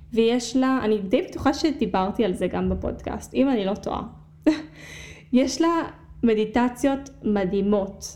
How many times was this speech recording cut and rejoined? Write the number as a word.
zero